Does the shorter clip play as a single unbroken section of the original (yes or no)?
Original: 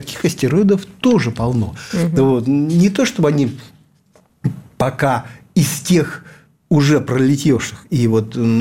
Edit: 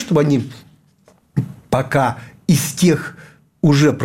yes